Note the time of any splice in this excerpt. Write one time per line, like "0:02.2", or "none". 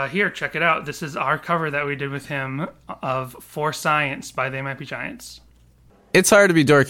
none